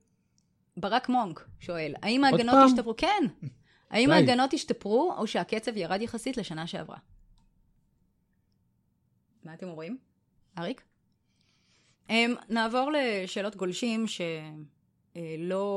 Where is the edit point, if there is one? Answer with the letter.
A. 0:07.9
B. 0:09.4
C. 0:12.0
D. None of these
C